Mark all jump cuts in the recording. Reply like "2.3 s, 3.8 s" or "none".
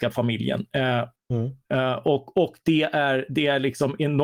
1.2 s

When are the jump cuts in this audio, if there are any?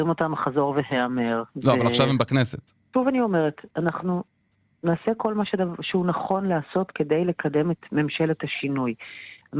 2.9 s

